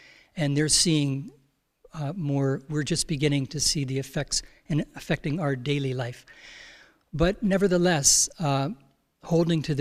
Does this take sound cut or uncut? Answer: uncut